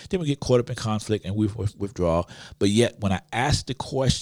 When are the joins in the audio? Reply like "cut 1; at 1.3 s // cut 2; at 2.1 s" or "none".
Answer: none